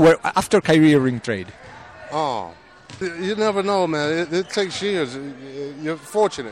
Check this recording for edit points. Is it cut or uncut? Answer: cut